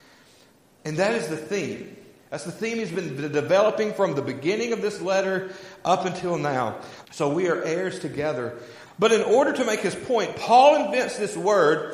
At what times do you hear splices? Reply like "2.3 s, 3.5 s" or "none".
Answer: 7.0 s, 8.9 s